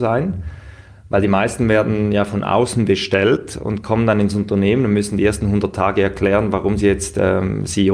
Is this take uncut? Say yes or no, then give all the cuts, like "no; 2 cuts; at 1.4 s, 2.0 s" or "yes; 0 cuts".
yes; 0 cuts